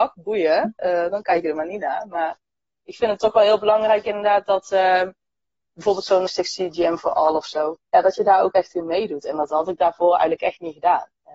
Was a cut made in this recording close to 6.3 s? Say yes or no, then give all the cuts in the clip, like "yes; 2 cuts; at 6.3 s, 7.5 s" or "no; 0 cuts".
yes; 2 cuts; at 6.3 s, 7.8 s